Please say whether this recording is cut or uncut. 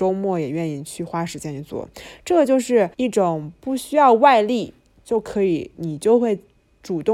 cut